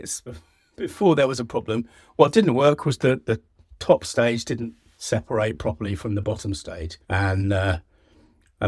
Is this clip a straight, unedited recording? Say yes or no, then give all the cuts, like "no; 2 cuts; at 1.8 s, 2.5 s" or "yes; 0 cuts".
no; 1 cut; at 7.0 s